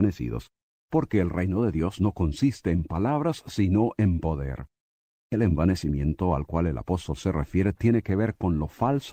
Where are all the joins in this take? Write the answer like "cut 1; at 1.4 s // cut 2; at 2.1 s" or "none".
none